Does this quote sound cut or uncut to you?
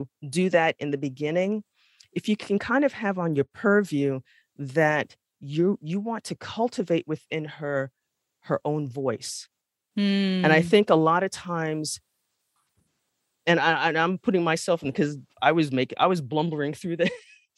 uncut